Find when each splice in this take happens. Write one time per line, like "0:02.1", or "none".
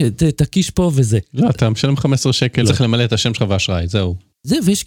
0:02.6